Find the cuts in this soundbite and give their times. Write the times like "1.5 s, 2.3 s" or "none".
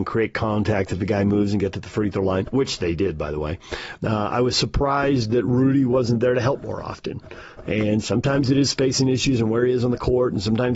4.0 s